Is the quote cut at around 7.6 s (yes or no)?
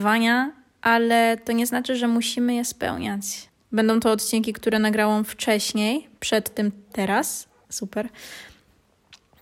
yes